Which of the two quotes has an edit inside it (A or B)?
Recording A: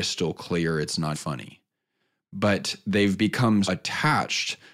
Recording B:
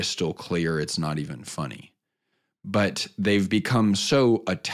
A